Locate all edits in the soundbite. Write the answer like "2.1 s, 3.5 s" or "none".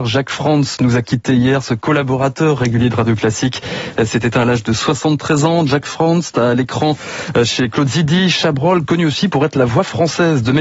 none